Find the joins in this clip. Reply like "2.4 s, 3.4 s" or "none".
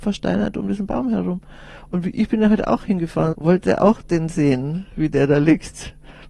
3.3 s